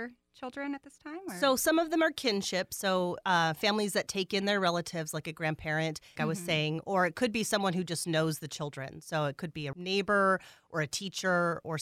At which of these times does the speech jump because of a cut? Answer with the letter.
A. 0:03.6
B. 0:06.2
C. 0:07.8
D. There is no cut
B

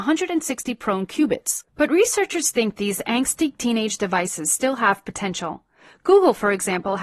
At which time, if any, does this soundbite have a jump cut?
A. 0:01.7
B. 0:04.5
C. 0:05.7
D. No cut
D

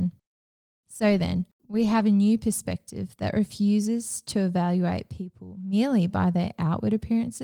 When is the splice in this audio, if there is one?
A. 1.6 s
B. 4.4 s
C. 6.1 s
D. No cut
A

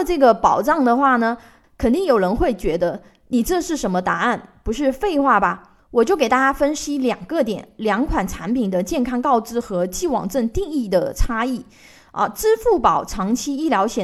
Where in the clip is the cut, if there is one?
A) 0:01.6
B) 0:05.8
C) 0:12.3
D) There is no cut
A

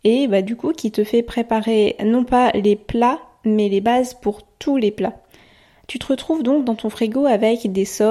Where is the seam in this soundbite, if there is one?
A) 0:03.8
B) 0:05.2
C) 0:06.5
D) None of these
D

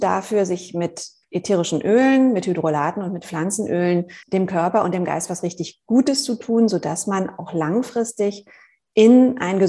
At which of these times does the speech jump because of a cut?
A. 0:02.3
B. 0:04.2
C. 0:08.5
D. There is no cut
B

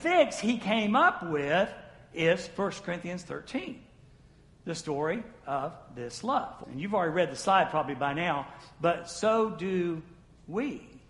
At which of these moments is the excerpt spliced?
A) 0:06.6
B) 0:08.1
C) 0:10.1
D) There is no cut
A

